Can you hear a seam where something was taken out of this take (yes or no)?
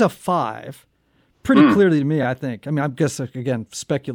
no